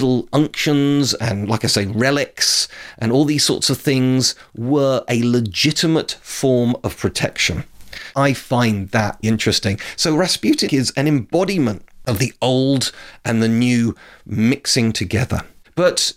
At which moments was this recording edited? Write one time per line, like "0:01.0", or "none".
0:08.1
0:09.2
0:10.7